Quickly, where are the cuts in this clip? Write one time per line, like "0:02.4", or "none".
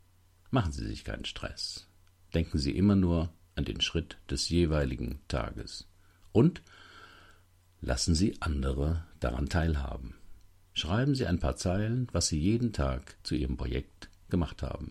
0:10.6
0:13.2